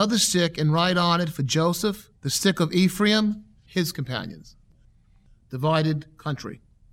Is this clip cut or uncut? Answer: cut